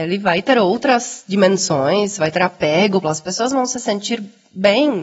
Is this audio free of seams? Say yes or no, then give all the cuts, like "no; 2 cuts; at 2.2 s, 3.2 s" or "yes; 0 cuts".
no; 1 cut; at 3.0 s